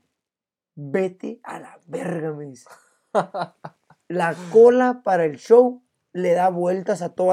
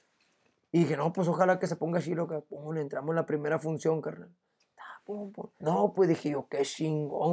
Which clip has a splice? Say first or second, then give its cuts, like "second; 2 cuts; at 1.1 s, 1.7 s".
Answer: second; 1 cut; at 5.6 s